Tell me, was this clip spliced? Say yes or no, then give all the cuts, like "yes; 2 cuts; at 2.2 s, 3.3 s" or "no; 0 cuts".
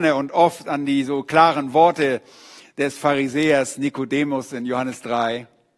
no; 0 cuts